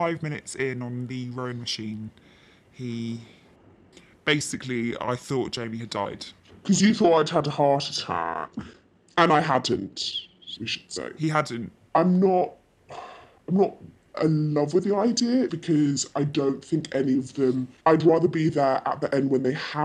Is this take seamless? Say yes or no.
no